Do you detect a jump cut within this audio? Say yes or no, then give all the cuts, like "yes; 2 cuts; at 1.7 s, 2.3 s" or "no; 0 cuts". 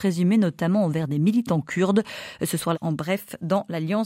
yes; 1 cut; at 2.7 s